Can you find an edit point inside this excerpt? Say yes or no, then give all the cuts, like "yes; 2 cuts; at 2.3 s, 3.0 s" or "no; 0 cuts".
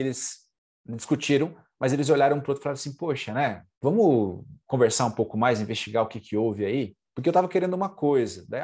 yes; 2 cuts; at 3.7 s, 7.1 s